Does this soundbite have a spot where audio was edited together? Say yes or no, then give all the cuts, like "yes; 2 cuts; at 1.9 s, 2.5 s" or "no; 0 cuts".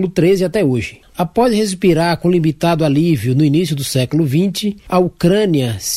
yes; 1 cut; at 1.0 s